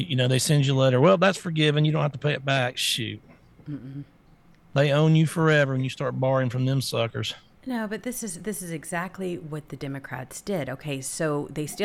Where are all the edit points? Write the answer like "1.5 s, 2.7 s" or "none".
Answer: none